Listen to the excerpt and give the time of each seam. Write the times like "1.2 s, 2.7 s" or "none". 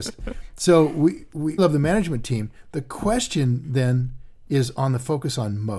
1.6 s

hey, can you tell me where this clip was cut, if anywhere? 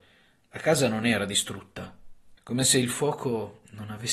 2.4 s

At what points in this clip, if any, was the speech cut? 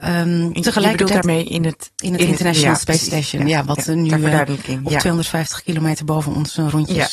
none

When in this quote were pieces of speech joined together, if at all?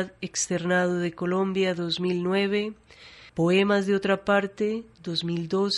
3.3 s

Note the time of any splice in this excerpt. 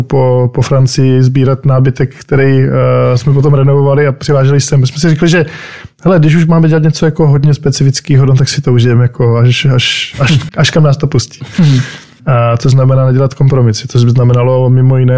10.5 s, 12.2 s

